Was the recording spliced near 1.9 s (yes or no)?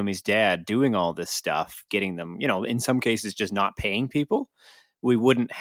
yes